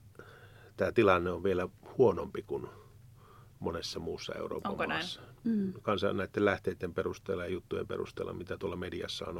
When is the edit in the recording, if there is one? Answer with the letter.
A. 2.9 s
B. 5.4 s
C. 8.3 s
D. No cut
B